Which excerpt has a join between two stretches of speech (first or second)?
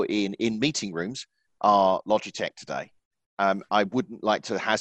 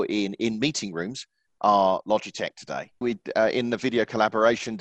second